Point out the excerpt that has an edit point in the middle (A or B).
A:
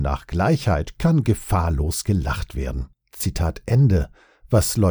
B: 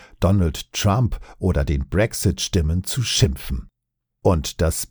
A